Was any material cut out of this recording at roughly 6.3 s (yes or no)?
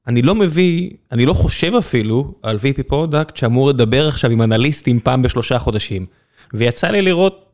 no